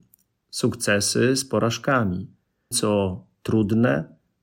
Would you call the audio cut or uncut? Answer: cut